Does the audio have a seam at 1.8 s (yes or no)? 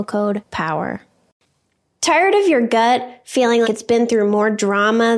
no